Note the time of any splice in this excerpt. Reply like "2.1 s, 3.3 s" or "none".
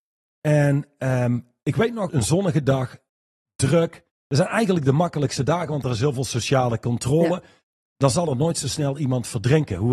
2.1 s